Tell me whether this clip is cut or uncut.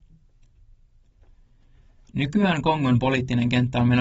uncut